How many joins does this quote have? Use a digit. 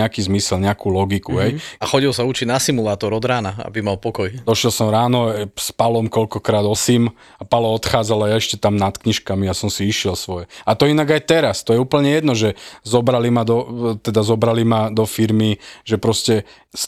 1